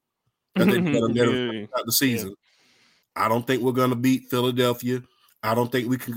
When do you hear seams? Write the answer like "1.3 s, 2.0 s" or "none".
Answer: 3.0 s